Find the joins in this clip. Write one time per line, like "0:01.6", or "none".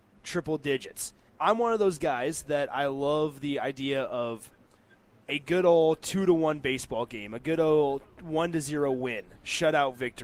0:01.3